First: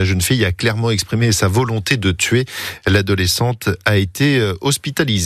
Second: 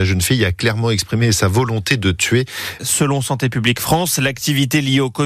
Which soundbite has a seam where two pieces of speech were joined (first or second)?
second